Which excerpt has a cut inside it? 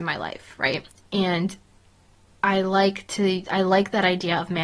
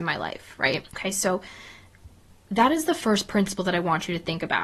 second; 1 cut; at 0.9 s

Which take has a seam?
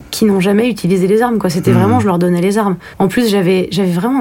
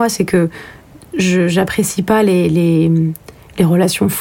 first; 1 cut; at 2.9 s

